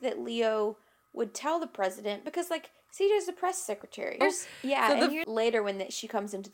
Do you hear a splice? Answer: yes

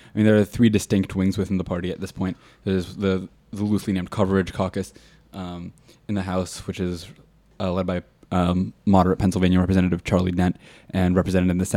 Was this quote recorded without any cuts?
yes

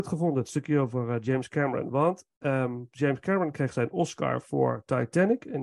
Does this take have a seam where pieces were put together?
no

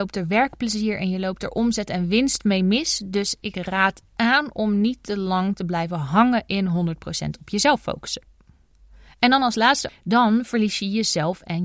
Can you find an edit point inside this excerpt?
yes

